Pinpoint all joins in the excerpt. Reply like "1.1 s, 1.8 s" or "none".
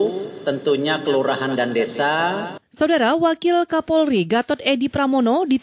2.6 s